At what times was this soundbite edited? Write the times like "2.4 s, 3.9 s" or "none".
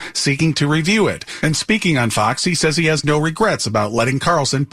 none